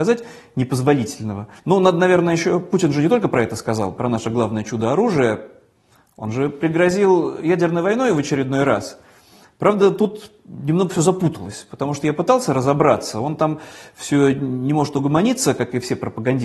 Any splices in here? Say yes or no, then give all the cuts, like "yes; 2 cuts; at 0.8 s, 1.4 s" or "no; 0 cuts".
yes; 1 cut; at 1.6 s